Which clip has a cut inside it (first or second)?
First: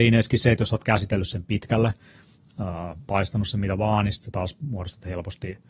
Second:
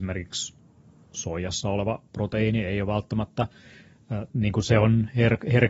second